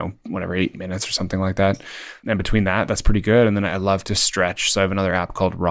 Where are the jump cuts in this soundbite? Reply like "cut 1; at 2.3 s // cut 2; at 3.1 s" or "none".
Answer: none